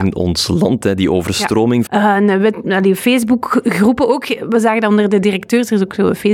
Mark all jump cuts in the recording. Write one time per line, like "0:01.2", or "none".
0:01.9